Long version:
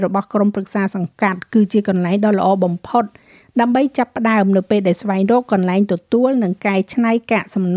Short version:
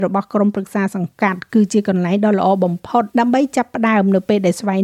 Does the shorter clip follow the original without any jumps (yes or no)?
no